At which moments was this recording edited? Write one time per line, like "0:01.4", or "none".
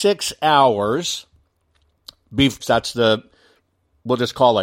0:02.6